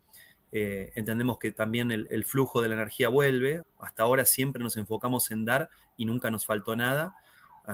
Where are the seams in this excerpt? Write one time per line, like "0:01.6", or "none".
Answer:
0:02.1
0:03.6